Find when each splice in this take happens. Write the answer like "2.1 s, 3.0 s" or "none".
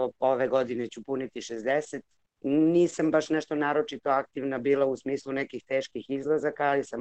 none